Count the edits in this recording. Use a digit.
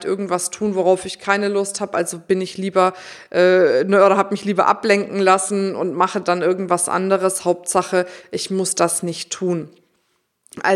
0